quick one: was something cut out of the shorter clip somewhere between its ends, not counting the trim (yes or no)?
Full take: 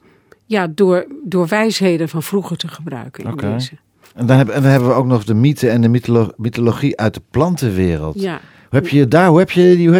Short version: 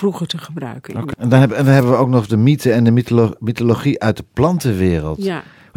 yes